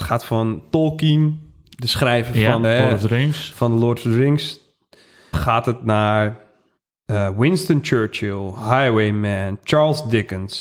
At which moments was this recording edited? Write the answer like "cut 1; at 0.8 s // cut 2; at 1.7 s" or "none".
cut 1; at 2.6 s // cut 2; at 5.3 s